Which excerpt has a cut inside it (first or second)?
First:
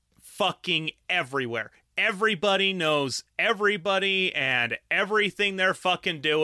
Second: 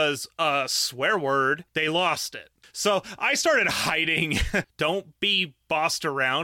second